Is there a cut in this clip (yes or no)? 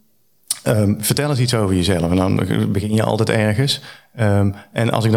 no